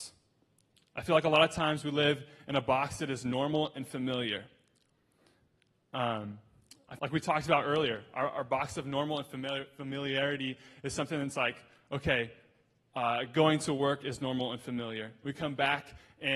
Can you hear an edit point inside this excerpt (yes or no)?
yes